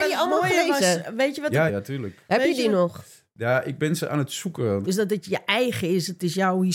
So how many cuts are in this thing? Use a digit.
2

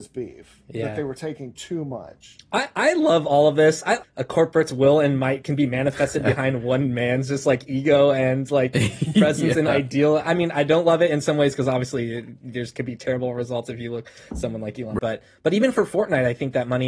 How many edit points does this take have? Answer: 2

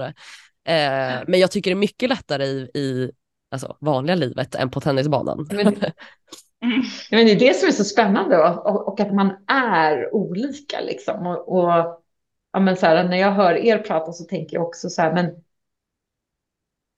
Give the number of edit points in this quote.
2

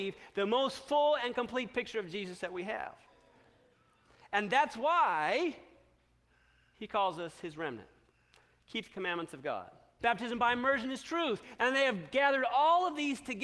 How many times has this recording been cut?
2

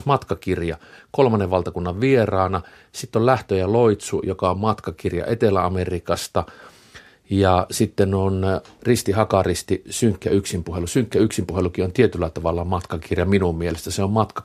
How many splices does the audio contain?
0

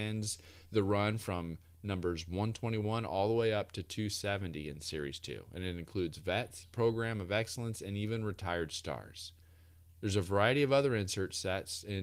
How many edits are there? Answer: 1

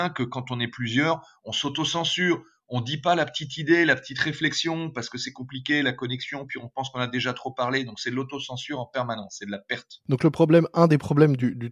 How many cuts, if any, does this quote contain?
0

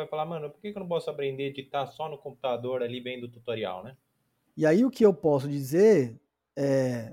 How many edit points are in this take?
1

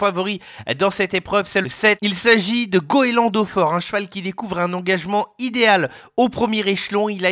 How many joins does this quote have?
0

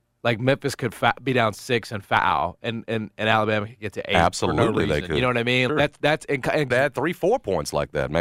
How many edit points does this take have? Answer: 2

